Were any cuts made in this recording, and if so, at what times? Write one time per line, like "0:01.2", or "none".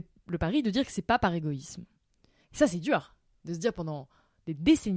0:02.4